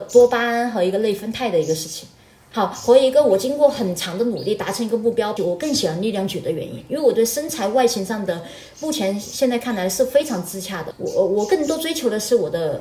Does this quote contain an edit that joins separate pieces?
yes; 3 cuts; at 2.5 s, 5.4 s, 10.9 s

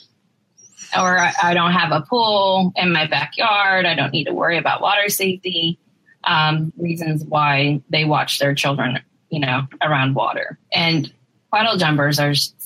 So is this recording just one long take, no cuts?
no; 2 cuts; at 6.7 s, 10.6 s

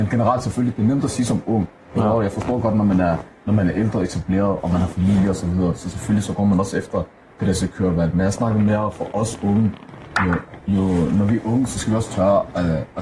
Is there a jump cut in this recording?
no; 0 cuts

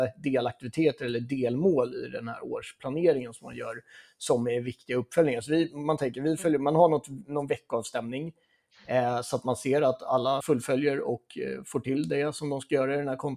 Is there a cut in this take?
yes; 1 cut; at 10.4 s

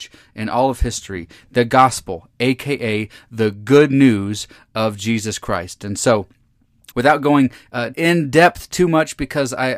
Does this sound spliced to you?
yes; 2 cuts; at 6.9 s, 7.9 s

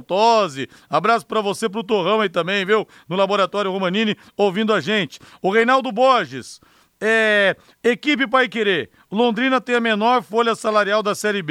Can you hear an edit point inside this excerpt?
no; 0 cuts

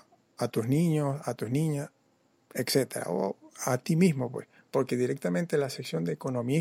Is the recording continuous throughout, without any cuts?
yes; 0 cuts

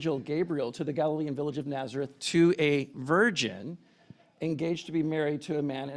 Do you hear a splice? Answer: no; 0 cuts

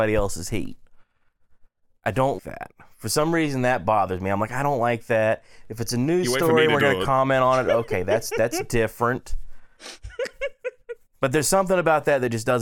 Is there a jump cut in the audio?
yes; 1 cut; at 2.4 s

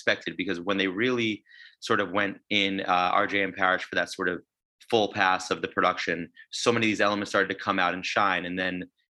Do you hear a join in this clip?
yes; 1 cut; at 6.5 s

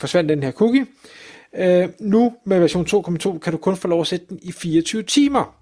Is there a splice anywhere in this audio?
no; 0 cuts

